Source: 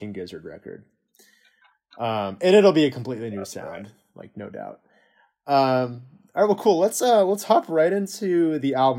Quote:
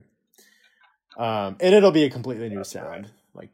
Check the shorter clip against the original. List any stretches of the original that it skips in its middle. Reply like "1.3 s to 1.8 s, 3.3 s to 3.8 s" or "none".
none